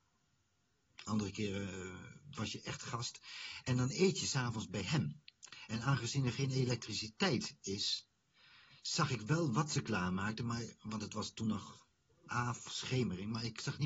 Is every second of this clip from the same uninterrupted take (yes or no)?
yes